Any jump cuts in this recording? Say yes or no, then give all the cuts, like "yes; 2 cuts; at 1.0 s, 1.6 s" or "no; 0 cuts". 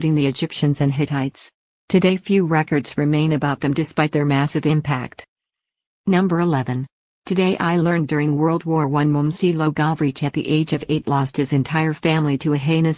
no; 0 cuts